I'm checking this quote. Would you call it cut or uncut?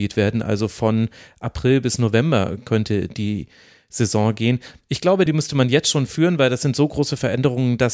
cut